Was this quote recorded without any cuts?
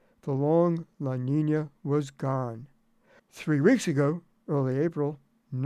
no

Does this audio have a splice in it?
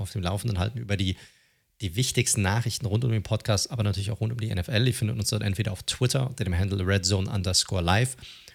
no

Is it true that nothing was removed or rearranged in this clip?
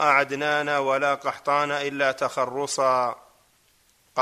yes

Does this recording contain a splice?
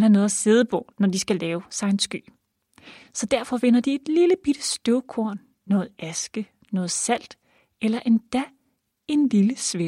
no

